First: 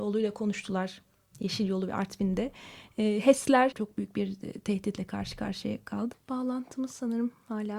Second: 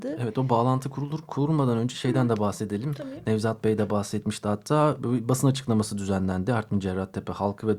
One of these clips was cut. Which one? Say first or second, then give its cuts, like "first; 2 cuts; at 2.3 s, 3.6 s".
first; 2 cuts; at 3.7 s, 6.1 s